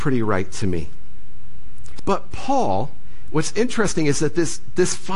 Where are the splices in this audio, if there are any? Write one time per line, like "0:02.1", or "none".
0:02.0

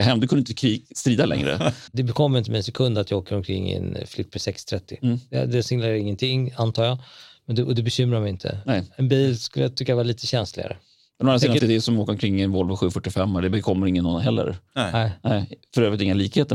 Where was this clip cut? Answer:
0:01.9
0:11.6

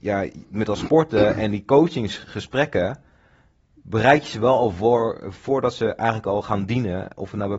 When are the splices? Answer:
none

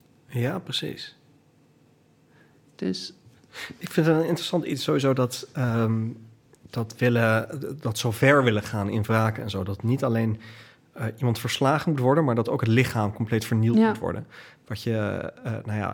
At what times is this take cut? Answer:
none

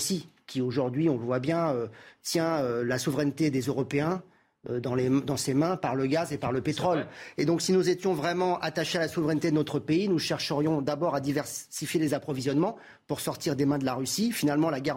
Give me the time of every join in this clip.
none

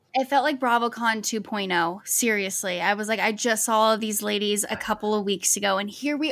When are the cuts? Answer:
none

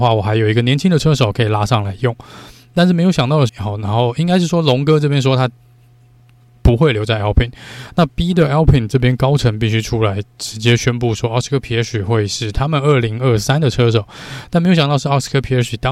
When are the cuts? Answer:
0:03.5

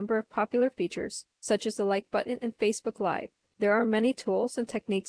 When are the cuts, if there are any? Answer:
0:01.3

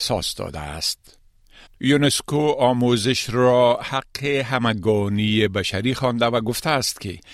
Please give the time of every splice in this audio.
0:01.7

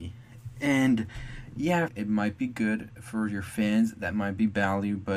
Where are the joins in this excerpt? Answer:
0:01.9

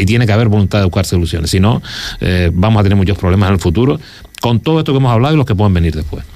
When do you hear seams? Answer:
none

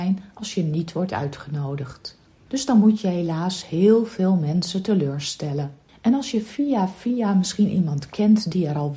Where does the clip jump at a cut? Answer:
0:02.5
0:05.9

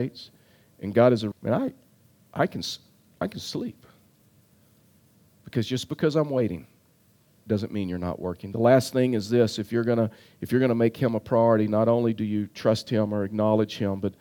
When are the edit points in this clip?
0:01.3

